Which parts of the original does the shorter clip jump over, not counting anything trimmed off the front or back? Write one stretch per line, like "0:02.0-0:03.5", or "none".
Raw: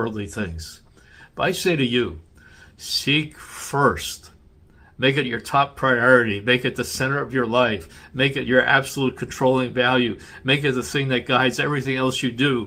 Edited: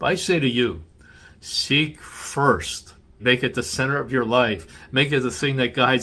0:04.6-0:06.4
0:08.1-0:10.4